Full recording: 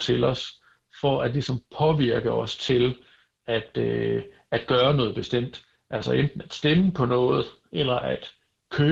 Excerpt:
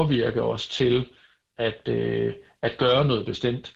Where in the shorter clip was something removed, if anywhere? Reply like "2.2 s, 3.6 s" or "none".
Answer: none

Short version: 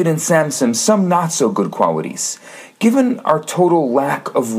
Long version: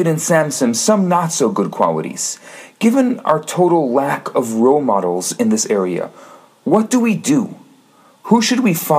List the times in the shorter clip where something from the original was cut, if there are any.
none

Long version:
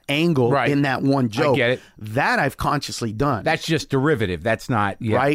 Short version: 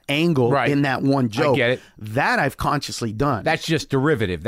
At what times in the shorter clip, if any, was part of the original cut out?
none

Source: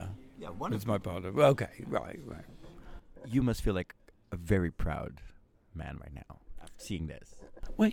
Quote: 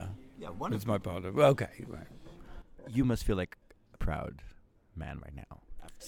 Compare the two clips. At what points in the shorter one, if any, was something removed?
1.8 s, 3.9 s

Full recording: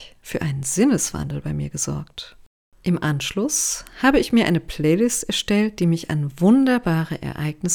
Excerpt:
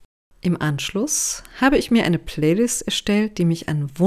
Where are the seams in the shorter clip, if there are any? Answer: none

